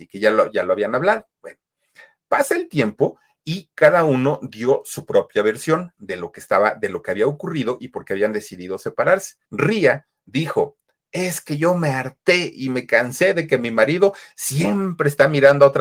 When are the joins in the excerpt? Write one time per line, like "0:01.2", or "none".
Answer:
0:09.4

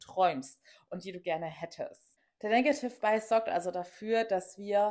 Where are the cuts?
none

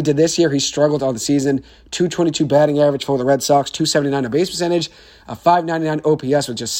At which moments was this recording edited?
none

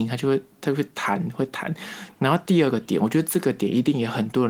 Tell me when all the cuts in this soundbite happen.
0:02.1

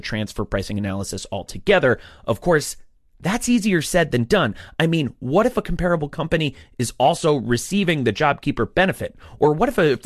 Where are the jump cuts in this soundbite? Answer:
none

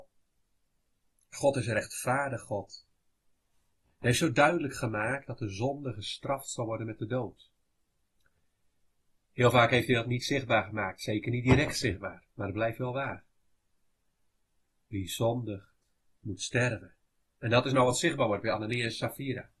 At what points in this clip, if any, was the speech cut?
0:12.3

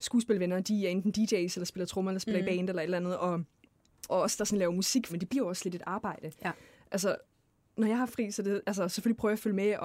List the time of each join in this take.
0:04.1
0:05.1

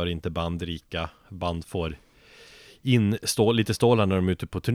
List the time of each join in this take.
none

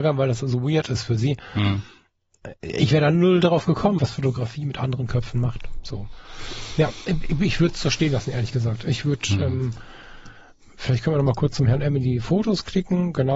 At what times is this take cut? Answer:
0:04.0

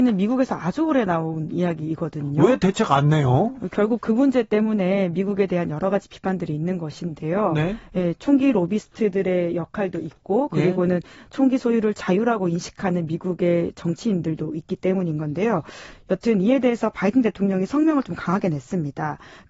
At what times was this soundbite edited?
none

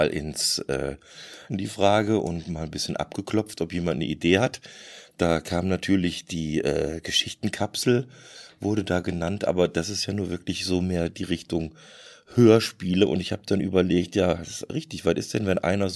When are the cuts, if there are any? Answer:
0:01.5

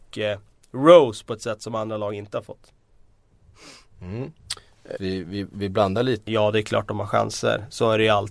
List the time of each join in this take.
0:05.0
0:06.3

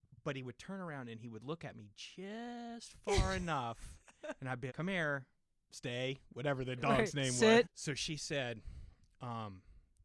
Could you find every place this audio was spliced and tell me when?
0:04.7
0:07.6

